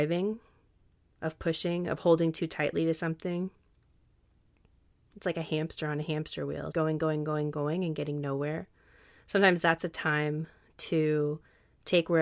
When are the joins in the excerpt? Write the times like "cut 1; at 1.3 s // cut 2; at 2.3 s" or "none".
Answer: cut 1; at 6.7 s

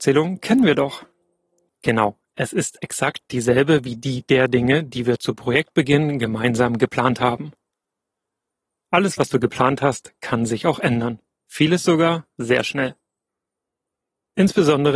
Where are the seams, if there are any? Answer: cut 1; at 11.3 s

